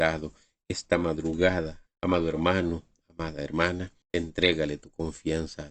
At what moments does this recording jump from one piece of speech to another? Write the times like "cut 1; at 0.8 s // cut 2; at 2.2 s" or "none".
cut 1; at 1.9 s // cut 2; at 4.0 s